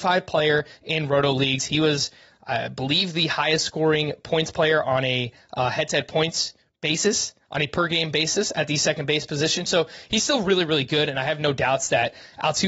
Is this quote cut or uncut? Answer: uncut